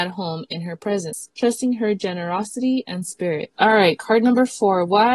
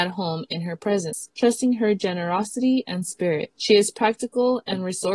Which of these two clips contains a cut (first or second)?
first